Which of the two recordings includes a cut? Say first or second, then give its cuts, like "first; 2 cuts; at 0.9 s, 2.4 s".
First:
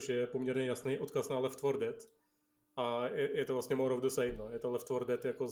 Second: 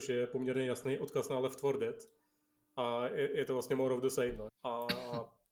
second; 1 cut; at 4.5 s